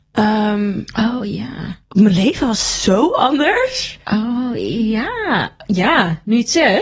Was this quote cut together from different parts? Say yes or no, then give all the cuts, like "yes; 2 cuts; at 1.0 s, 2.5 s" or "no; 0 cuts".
yes; 1 cut; at 4.0 s